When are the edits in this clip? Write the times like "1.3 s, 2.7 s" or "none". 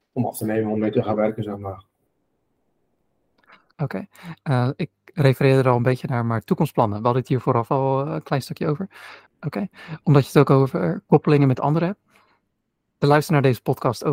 9.3 s